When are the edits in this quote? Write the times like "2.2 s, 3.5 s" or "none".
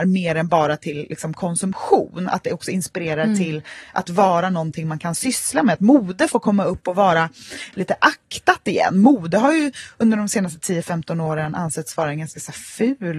none